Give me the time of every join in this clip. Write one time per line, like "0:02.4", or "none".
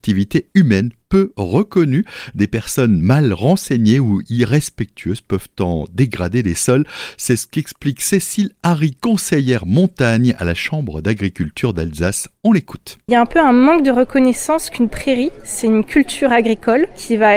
none